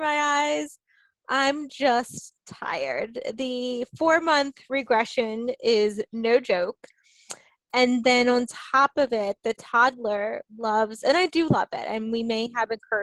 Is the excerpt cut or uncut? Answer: uncut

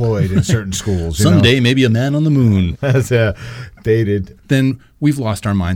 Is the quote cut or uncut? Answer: cut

